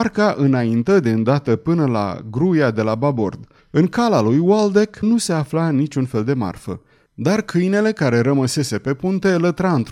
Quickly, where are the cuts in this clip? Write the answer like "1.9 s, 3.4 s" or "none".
3.6 s, 5.0 s, 7.1 s